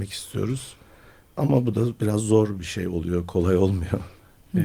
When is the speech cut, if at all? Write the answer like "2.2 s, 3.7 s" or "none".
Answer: none